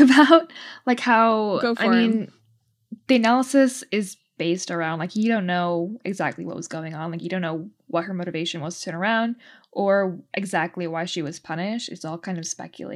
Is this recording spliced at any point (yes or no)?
no